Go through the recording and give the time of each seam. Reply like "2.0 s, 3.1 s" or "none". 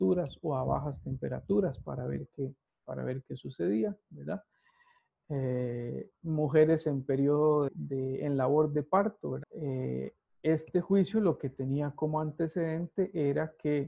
7.7 s, 9.4 s